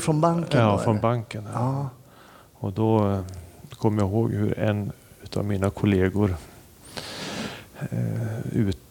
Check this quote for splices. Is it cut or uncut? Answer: uncut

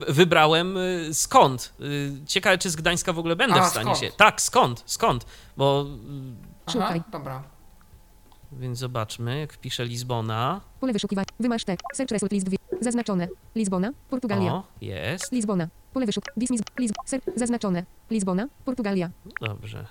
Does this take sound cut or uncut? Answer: uncut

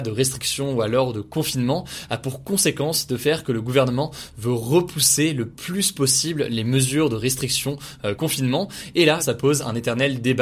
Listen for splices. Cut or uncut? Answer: cut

